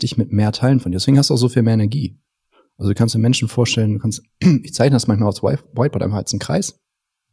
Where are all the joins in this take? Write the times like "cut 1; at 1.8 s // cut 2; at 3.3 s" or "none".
none